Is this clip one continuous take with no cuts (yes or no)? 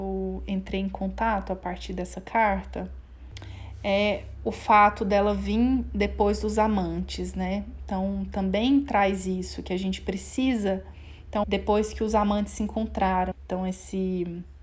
no